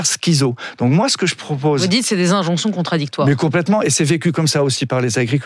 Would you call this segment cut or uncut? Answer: uncut